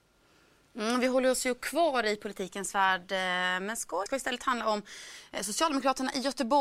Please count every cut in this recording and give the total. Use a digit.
1